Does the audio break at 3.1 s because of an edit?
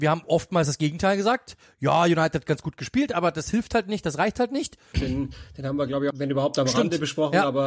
no; 2 cuts; at 4.9 s, 6.1 s

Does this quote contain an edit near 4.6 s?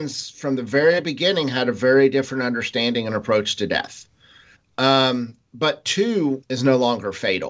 yes; 2 cuts; at 4.6 s, 6.4 s

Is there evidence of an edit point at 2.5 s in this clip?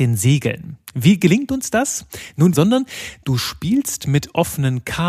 yes; 1 cut; at 2.5 s

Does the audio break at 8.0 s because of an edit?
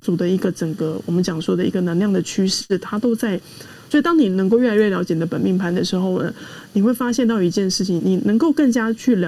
yes; 2 cuts; at 3.9 s, 8.0 s

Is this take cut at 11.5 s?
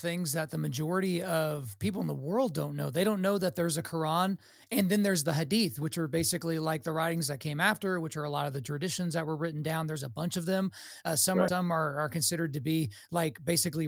yes; 1 cut; at 11.5 s

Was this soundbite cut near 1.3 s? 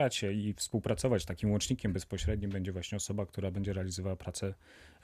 no; 0 cuts

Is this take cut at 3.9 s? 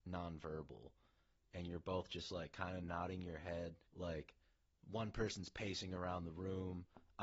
yes; 1 cut; at 3.9 s

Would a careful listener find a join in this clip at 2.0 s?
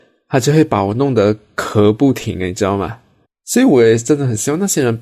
no; 1 cut; at 3.2 s

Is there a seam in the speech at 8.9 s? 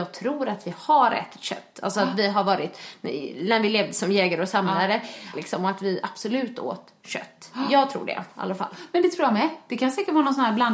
no; 1 cut; at 5.3 s

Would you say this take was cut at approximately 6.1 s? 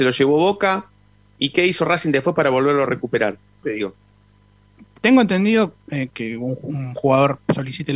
yes; 2 cuts; at 3.6 s, 6.1 s

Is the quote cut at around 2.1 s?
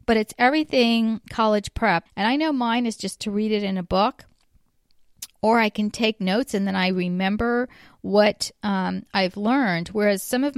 yes; 1 cut; at 2.1 s

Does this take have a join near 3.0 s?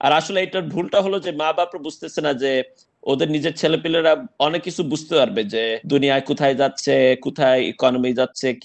no; 2 cuts; at 4.3 s, 5.8 s

